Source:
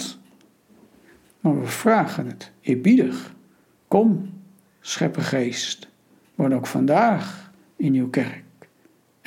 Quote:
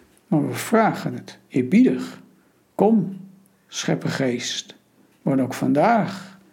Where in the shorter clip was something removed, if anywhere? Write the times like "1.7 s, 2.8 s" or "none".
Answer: none